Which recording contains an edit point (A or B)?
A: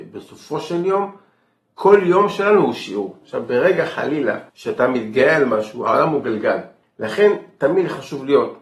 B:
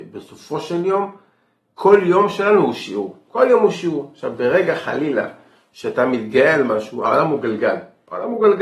A